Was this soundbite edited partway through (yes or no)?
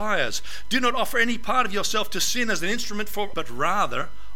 yes